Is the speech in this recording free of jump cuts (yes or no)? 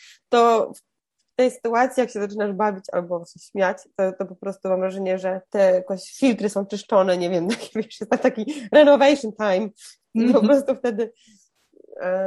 no